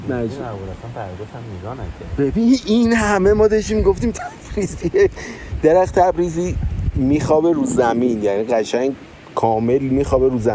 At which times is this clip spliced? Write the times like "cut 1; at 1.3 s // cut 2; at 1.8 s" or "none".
cut 1; at 4.1 s